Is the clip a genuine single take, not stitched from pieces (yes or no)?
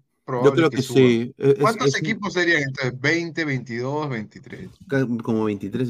yes